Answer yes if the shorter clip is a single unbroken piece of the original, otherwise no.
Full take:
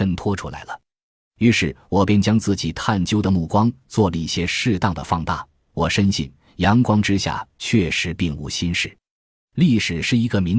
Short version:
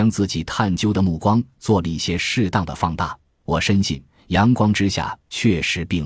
yes